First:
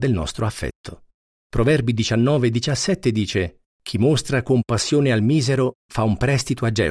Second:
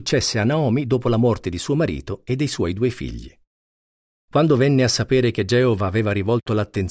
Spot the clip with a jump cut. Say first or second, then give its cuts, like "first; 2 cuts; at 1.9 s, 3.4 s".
first; 2 cuts; at 1.4 s, 3.7 s